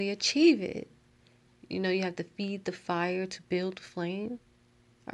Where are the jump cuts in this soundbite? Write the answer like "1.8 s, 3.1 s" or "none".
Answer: 1.5 s

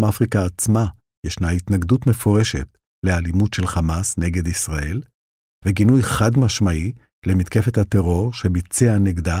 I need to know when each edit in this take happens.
none

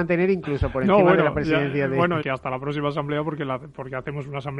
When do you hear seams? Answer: 2.2 s

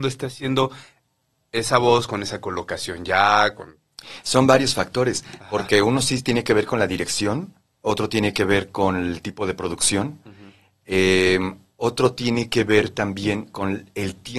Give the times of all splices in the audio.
none

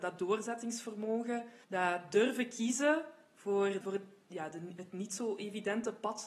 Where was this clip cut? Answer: 1.6 s, 3.8 s

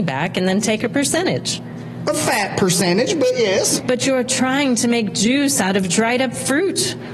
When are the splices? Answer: 3.8 s

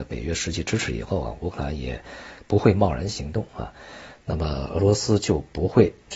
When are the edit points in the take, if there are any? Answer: 4.1 s

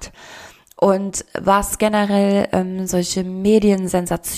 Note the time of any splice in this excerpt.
2.9 s

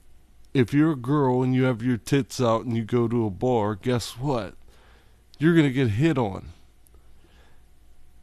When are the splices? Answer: none

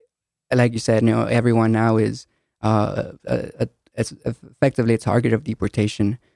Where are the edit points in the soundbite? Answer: none

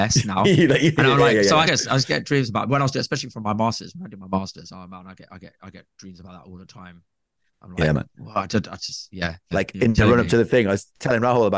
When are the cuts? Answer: 1.7 s, 9.5 s

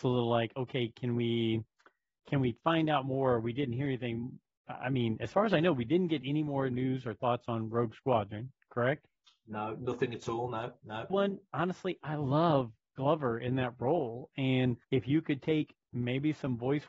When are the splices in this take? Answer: 11.1 s, 14.8 s

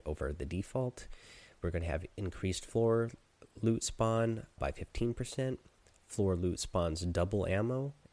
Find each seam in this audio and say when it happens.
4.6 s

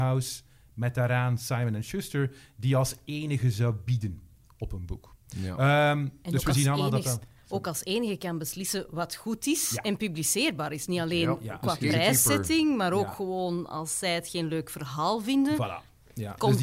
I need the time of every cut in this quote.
none

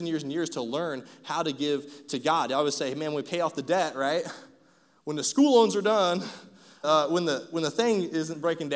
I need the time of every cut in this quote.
6.8 s

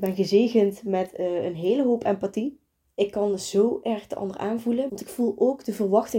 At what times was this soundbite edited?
2.8 s, 4.9 s

